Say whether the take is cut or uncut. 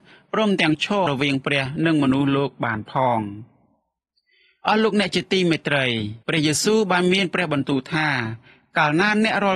cut